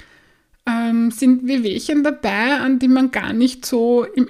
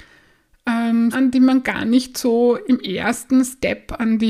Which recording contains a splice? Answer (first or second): second